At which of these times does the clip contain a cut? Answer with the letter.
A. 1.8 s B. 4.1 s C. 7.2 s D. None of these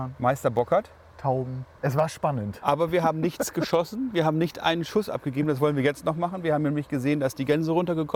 A